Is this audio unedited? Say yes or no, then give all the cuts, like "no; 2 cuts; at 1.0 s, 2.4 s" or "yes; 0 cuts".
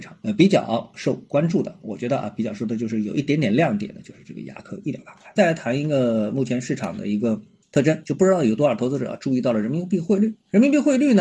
no; 1 cut; at 5.4 s